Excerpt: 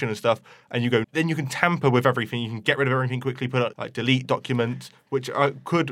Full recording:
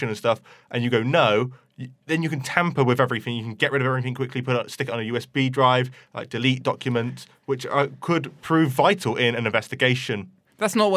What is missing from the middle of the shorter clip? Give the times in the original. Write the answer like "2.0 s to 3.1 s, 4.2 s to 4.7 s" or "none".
1.0 s to 2.0 s, 4.7 s to 6.1 s